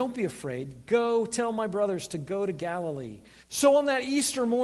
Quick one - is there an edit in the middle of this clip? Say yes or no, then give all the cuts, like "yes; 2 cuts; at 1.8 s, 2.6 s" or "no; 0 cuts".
yes; 1 cut; at 3.4 s